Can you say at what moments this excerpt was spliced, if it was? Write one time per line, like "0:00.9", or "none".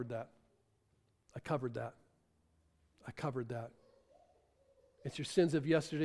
none